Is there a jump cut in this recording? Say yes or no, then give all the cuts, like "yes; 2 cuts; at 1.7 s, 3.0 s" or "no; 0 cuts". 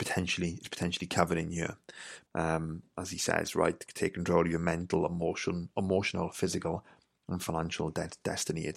yes; 1 cut; at 2.3 s